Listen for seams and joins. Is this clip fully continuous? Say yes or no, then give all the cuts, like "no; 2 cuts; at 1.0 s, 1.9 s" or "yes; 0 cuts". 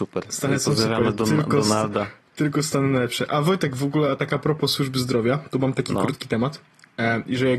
yes; 0 cuts